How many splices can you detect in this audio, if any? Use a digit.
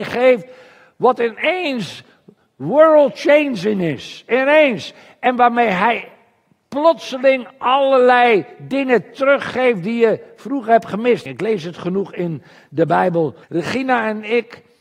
2